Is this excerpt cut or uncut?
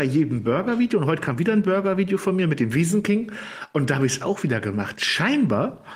uncut